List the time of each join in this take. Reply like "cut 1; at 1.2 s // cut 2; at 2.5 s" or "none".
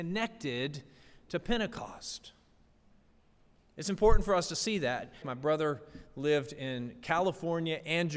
cut 1; at 5.2 s